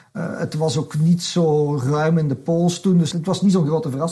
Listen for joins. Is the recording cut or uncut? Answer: cut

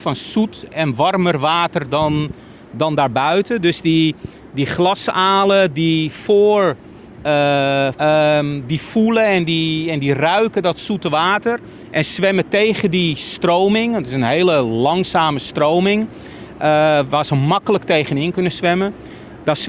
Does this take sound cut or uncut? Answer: cut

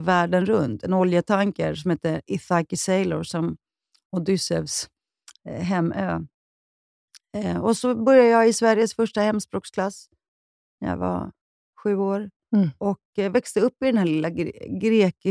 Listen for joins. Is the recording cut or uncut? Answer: uncut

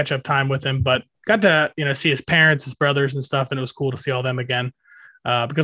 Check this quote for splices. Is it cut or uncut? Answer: uncut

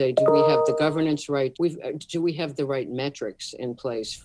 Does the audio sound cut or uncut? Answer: cut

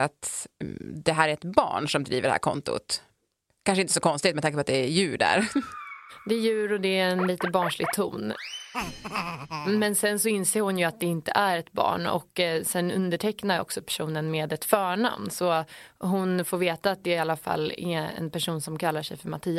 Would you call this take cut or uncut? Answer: uncut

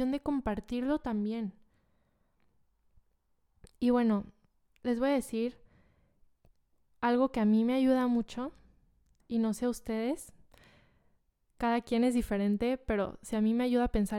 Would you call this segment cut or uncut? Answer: uncut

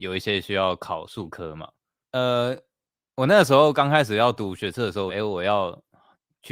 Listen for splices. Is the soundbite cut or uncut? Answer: cut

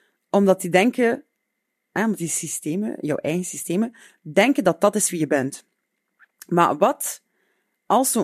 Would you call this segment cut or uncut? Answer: uncut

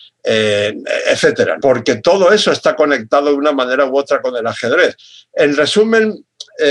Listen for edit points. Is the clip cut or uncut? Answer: cut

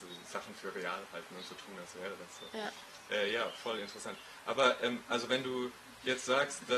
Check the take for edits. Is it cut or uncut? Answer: uncut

